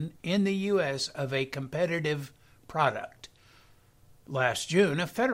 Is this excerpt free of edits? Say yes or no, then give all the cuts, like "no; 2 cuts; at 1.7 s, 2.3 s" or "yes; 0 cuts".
yes; 0 cuts